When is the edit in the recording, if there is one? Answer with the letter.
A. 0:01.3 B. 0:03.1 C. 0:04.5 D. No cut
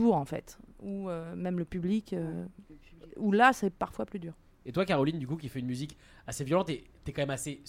D